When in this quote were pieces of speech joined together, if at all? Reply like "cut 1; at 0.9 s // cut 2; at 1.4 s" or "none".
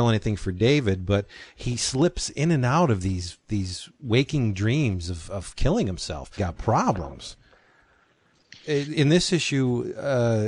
cut 1; at 6.4 s // cut 2; at 8.9 s